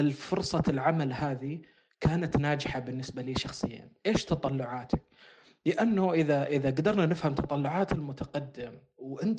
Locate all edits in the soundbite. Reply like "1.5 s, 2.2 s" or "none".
none